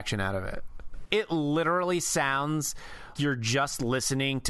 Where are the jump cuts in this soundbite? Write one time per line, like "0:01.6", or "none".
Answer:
0:01.1
0:03.2